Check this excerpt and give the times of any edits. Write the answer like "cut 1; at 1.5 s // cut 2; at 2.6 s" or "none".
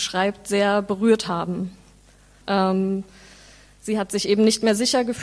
cut 1; at 2.4 s